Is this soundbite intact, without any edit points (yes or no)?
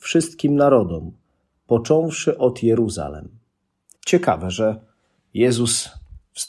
no